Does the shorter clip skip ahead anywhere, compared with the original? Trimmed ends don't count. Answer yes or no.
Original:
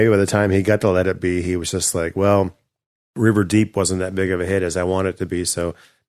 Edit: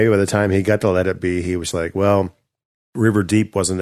yes